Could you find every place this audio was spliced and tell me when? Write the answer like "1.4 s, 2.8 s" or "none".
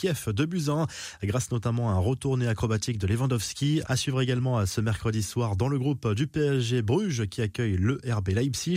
3.9 s